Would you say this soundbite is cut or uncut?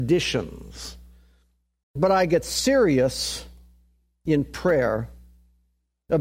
cut